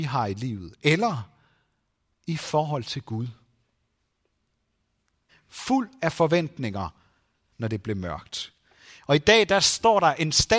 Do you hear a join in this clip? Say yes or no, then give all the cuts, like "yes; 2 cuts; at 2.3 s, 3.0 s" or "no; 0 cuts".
yes; 2 cuts; at 5.3 s, 7.5 s